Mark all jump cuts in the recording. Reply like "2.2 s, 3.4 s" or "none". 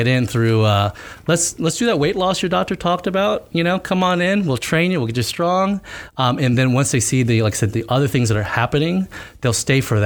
none